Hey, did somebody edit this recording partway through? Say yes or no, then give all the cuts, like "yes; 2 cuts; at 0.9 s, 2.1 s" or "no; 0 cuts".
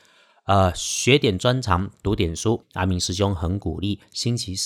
yes; 1 cut; at 2.6 s